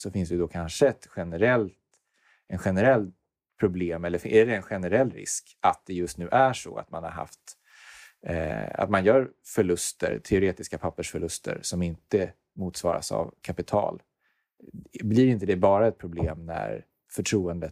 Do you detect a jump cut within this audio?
no; 0 cuts

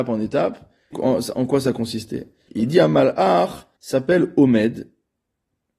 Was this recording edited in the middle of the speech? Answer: yes; 3 cuts; at 0.9 s, 2.5 s, 3.8 s

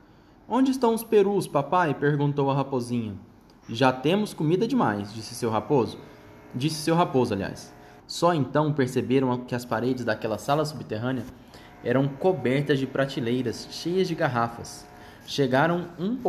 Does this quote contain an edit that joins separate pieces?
yes; 1 cut; at 8.0 s

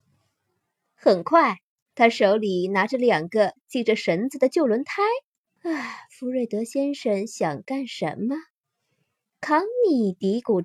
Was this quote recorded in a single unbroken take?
no; 2 cuts; at 1.9 s, 5.6 s

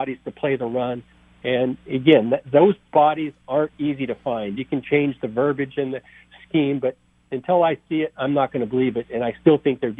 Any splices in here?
yes; 1 cut; at 4.6 s

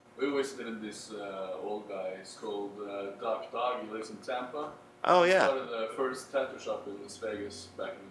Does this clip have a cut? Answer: no; 0 cuts

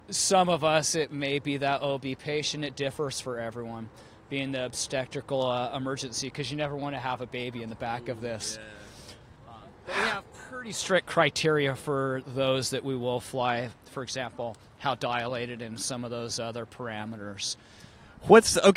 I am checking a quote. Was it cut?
no; 0 cuts

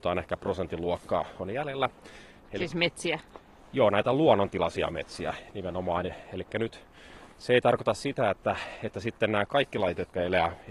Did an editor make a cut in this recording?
no; 0 cuts

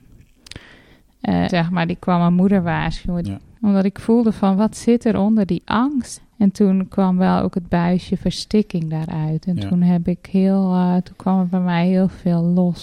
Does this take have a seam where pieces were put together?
yes; 3 cuts; at 1.5 s, 3.2 s, 6.2 s

